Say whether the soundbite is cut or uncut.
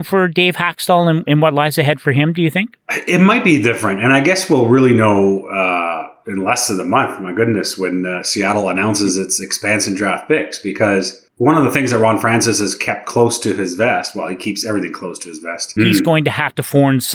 cut